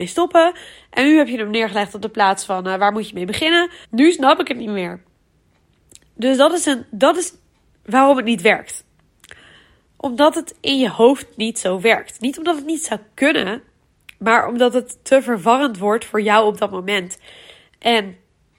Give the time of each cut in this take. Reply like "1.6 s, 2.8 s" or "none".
3.8 s